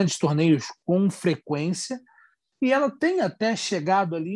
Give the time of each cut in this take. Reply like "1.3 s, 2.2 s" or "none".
none